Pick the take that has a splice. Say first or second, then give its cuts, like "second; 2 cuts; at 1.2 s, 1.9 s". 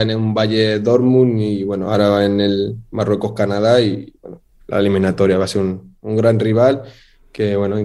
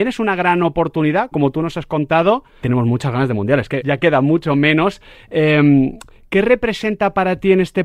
second; 3 cuts; at 1.3 s, 2.6 s, 3.8 s